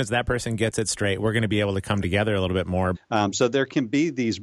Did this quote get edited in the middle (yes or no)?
yes